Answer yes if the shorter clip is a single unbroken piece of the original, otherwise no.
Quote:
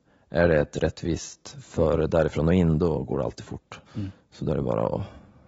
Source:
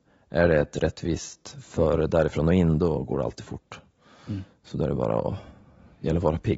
no